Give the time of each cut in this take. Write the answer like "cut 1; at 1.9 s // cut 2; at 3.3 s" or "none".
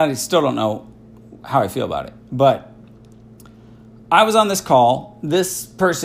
none